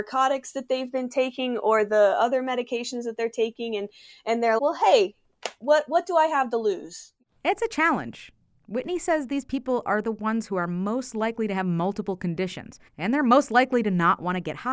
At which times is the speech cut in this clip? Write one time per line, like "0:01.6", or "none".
0:04.6
0:12.9